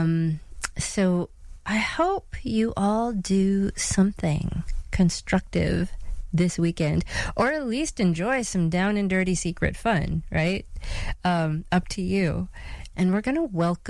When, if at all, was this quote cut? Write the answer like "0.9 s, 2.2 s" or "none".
12.9 s